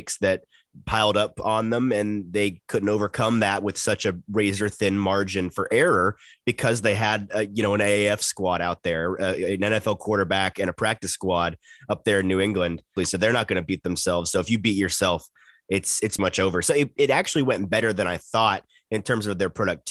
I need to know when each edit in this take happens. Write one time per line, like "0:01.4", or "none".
0:13.0
0:16.2